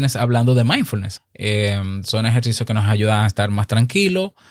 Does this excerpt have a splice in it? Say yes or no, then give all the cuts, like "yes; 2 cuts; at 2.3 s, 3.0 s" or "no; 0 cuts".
yes; 1 cut; at 1.2 s